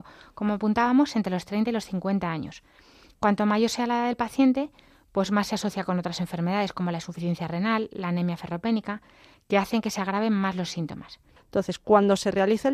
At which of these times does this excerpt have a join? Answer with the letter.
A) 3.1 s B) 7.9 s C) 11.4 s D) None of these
C